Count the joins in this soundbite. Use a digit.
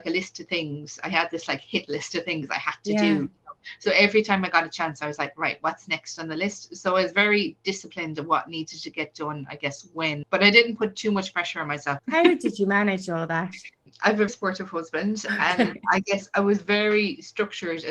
3